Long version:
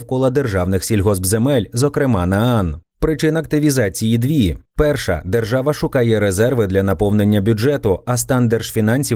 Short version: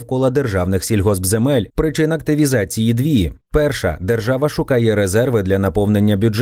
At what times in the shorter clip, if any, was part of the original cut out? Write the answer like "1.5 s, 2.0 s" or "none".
1.7 s